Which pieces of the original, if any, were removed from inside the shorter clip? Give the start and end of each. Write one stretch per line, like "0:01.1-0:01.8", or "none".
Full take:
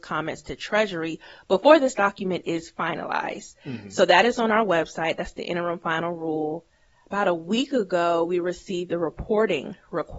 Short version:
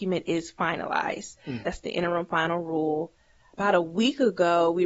0:03.8-0:05.2